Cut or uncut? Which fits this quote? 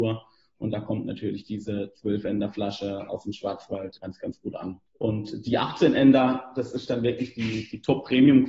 uncut